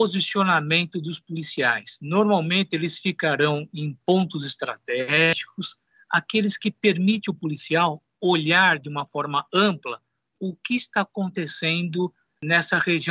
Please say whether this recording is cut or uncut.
uncut